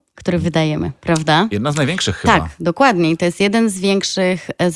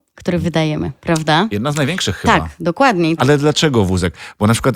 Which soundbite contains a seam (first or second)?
second